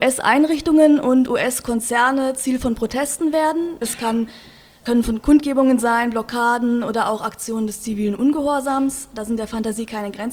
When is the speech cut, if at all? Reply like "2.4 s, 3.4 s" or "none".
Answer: 3.8 s